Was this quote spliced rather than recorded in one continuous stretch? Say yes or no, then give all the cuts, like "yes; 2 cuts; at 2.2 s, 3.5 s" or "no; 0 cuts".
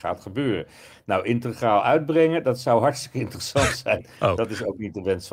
yes; 1 cut; at 4.0 s